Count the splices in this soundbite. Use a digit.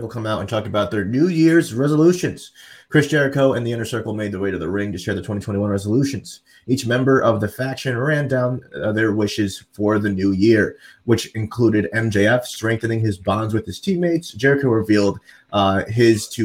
0